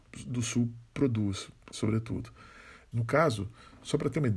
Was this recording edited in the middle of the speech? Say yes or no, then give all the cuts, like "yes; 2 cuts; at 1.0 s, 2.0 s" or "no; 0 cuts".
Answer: yes; 2 cuts; at 1.7 s, 2.9 s